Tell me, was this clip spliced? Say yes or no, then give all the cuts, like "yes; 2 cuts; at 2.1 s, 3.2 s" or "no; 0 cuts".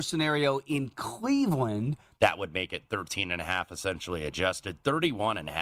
yes; 1 cut; at 2.2 s